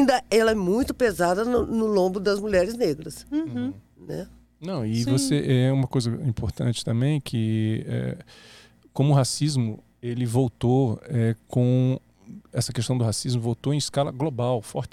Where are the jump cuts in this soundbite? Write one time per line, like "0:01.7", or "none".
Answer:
none